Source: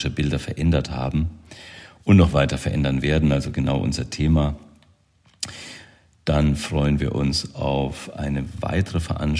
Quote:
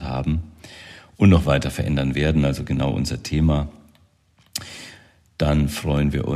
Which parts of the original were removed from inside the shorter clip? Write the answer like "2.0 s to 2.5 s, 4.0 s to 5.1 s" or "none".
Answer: none